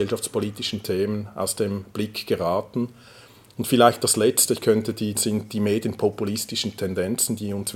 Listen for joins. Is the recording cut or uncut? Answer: cut